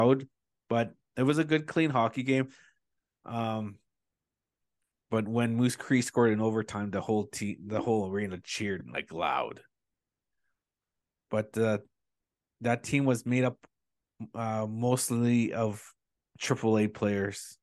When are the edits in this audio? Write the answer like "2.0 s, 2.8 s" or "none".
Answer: none